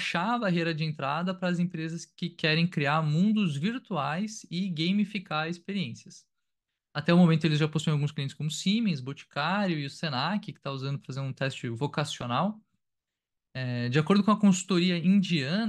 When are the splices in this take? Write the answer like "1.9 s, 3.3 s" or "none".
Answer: none